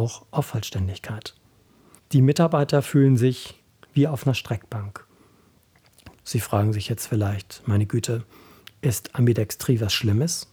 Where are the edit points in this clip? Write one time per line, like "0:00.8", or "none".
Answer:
0:02.0
0:06.1